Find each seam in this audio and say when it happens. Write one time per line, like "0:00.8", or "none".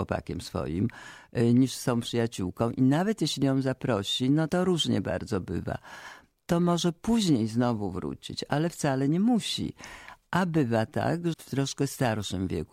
0:04.5
0:11.3